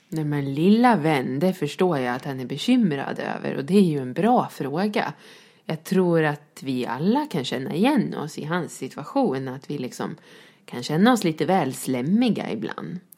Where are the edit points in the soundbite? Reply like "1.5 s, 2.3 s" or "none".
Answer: none